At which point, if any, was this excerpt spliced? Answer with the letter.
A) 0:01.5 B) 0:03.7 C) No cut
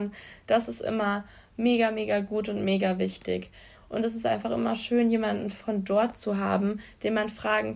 B